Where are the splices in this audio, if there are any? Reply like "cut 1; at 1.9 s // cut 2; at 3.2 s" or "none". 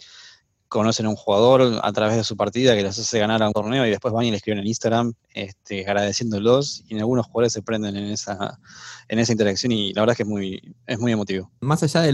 cut 1; at 5.2 s